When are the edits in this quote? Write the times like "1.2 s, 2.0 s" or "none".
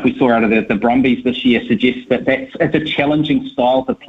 none